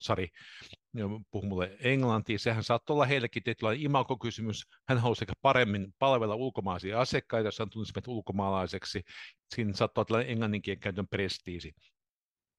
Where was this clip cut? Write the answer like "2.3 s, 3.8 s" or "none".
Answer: 9.4 s